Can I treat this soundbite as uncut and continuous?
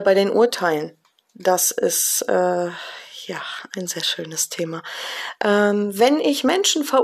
yes; 0 cuts

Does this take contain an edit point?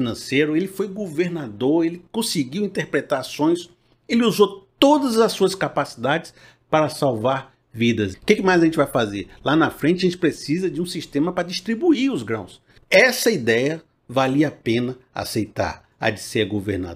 yes; 2 cuts; at 8.1 s, 12.8 s

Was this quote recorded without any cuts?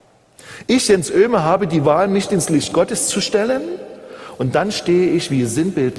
yes; 0 cuts

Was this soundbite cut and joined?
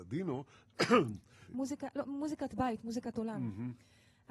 yes; 1 cut; at 1.5 s

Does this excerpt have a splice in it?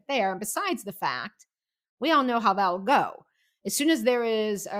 no; 0 cuts

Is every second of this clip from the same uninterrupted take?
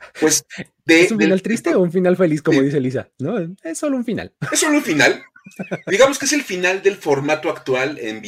yes; 0 cuts

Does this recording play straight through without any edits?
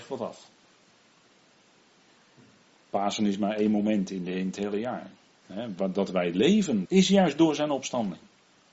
no; 2 cuts; at 5.3 s, 6.8 s

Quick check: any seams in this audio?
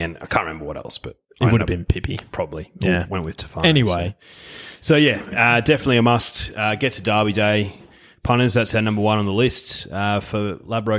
no; 0 cuts

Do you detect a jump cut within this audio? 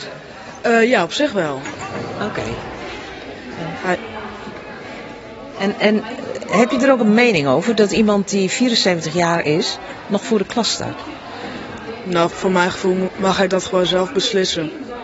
yes; 1 cut; at 12.3 s

